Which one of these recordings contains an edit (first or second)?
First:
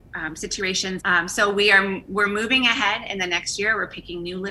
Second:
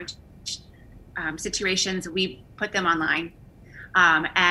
first